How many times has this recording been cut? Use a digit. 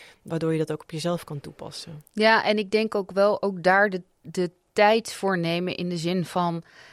0